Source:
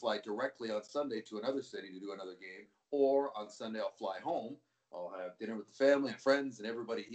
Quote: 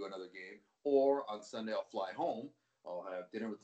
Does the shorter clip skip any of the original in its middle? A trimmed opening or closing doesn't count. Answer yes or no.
no